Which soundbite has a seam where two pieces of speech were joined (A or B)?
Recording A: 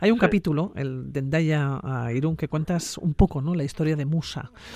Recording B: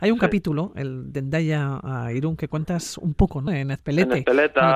B